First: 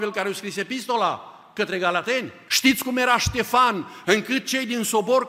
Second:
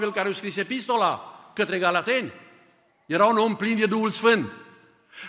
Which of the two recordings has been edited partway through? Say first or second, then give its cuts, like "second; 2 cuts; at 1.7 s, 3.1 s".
first; 2 cuts; at 2.5 s, 4.0 s